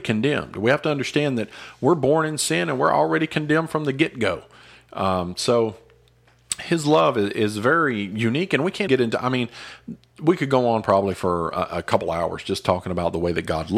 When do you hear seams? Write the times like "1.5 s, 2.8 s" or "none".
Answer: 8.9 s